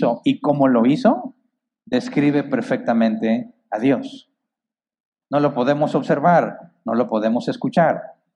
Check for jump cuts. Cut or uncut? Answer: cut